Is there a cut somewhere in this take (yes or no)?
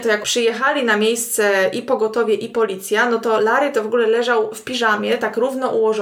no